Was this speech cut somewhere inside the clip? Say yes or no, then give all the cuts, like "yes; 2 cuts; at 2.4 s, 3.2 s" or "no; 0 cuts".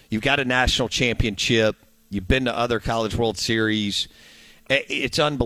no; 0 cuts